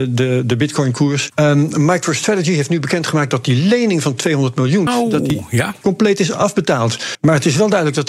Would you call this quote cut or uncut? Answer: cut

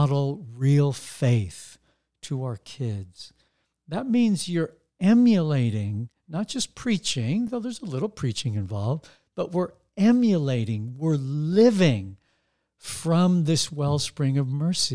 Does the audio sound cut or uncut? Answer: uncut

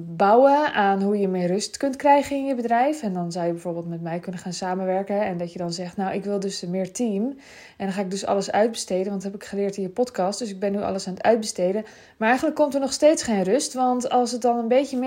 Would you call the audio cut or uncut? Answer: uncut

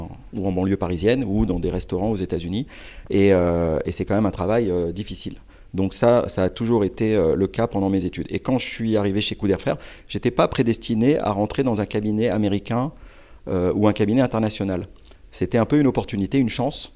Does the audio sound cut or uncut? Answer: uncut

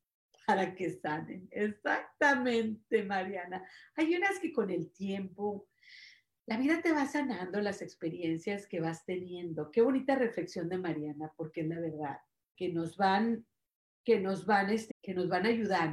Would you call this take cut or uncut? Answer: cut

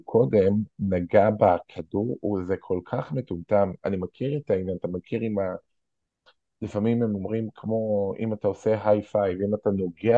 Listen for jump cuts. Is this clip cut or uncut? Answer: uncut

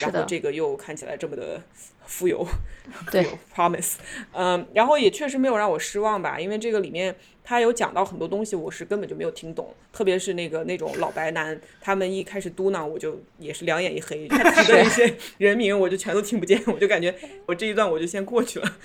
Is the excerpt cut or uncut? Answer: cut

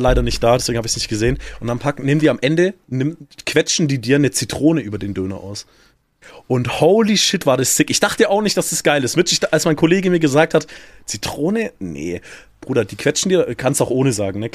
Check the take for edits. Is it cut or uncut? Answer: uncut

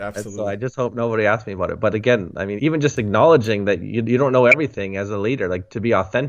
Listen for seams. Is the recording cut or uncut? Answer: cut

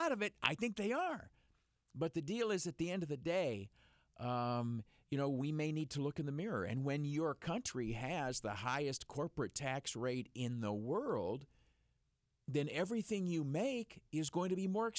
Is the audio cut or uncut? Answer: uncut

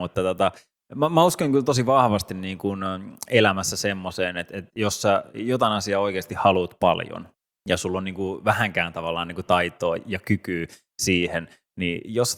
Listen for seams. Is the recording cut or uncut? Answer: uncut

